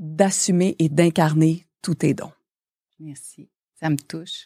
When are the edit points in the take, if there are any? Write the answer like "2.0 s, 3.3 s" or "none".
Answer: none